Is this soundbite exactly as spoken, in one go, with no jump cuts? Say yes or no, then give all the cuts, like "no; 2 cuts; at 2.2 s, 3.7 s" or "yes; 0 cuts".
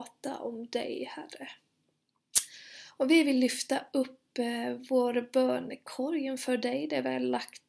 yes; 0 cuts